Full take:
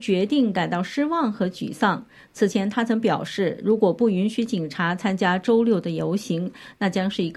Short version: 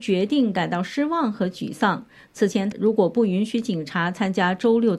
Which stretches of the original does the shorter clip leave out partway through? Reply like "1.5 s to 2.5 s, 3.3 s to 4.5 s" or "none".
2.7 s to 3.6 s